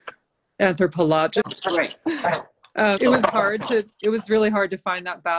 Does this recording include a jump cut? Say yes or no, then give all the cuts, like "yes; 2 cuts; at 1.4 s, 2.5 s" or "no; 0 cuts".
yes; 2 cuts; at 1.4 s, 3.0 s